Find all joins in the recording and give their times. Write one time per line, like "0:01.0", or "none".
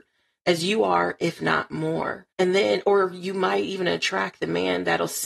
0:02.3